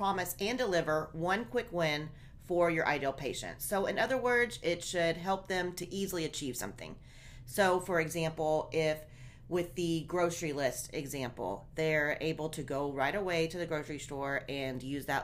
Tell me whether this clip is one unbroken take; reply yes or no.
yes